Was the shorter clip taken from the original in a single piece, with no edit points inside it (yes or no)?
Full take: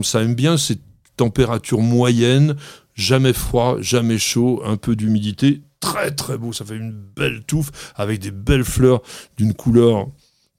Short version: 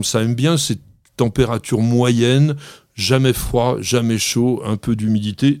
yes